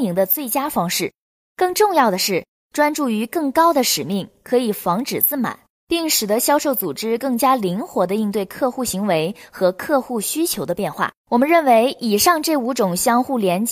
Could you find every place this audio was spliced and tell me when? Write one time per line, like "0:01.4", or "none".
0:11.2